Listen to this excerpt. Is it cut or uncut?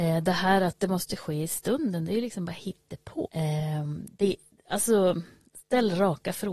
cut